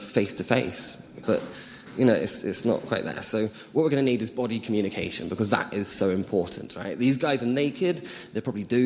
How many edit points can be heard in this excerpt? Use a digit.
1